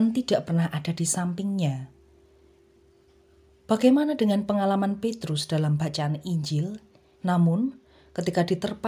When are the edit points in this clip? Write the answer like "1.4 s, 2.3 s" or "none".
7.1 s